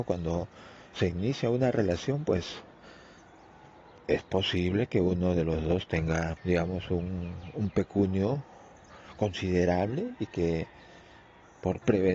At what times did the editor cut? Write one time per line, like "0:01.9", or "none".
0:06.4